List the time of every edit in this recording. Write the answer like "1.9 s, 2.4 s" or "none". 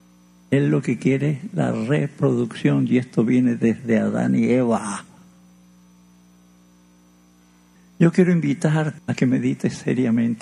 7.8 s, 9.0 s